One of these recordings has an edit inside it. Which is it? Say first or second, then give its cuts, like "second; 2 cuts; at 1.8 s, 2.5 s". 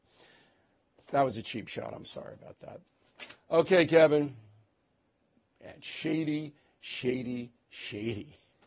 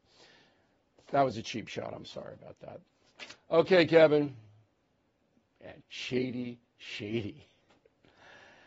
second; 1 cut; at 5.8 s